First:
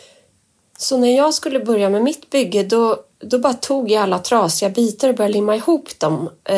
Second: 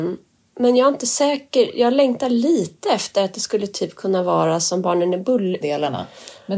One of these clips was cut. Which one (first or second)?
second